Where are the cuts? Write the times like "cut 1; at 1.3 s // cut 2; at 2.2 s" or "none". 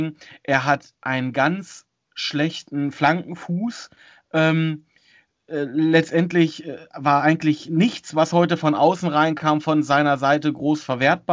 none

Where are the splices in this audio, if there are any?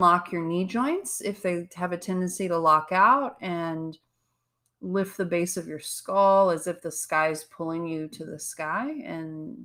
none

